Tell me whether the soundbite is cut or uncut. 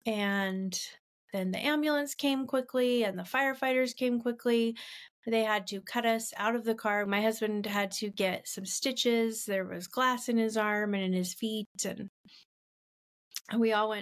cut